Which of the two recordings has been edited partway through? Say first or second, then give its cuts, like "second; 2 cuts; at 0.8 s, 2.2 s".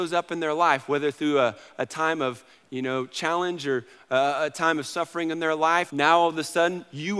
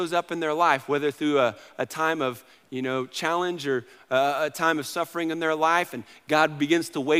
first; 1 cut; at 5.9 s